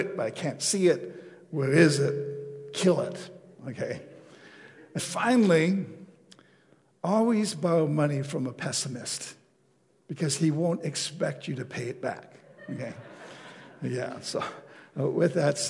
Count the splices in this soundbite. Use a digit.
1